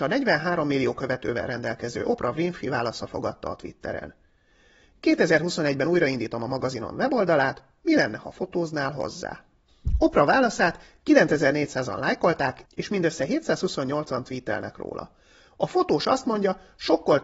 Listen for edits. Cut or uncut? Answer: uncut